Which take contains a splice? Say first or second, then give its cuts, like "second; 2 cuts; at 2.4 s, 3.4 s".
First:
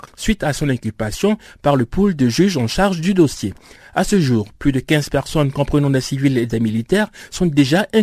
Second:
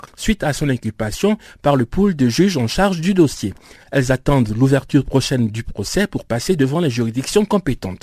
second; 1 cut; at 3.8 s